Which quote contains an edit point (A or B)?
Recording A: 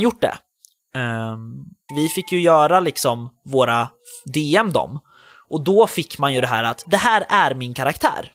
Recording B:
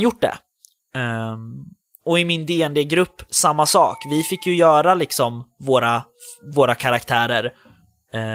A